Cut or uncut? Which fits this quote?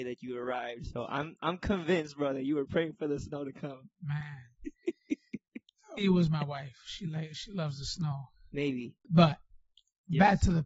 cut